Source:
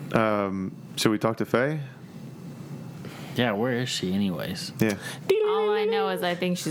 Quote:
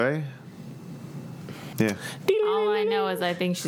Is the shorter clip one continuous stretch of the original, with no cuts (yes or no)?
no